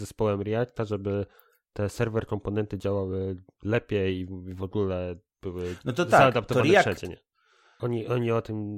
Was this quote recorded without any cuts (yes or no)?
no